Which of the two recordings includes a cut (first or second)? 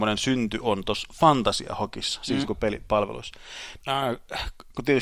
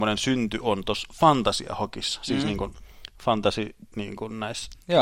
first